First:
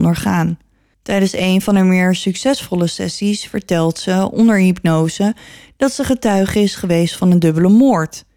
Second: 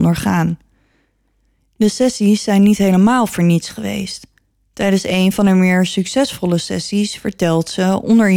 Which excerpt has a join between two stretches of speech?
first; 1 cut; at 0.9 s

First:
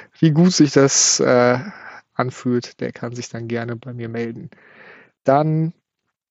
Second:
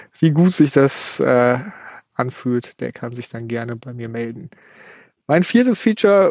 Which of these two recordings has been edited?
first; 1 cut; at 5.2 s

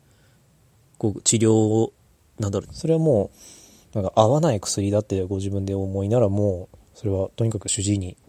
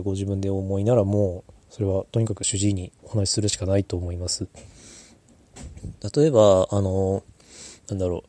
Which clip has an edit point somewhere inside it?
first; 1 cut; at 2.7 s

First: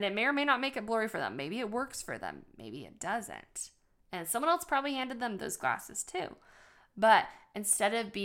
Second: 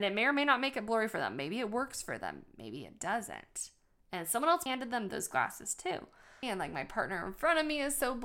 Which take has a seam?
second; 2 cuts; at 4.7 s, 6.4 s

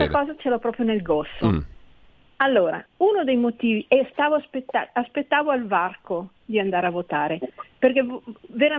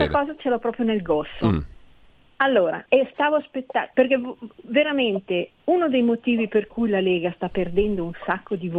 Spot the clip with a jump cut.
second; 3 cuts; at 2.9 s, 3.9 s, 5.6 s

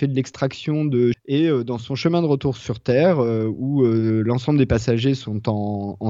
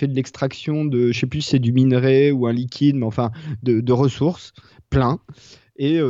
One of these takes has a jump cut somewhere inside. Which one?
first; 1 cut; at 1.1 s

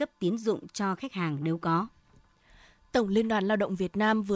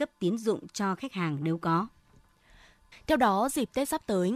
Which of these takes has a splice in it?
second; 1 cut; at 2.9 s

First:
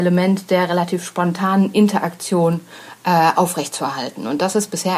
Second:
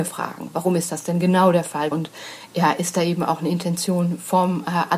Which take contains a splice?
second; 1 cut; at 1.9 s

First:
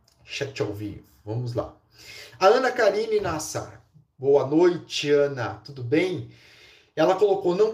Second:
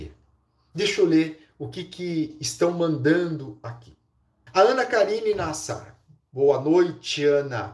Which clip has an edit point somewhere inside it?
second; 1 cut; at 4.5 s

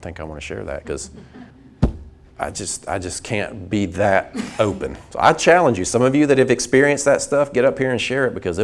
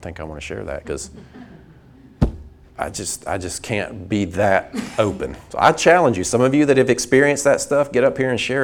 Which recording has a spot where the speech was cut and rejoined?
first; 1 cut; at 1.5 s

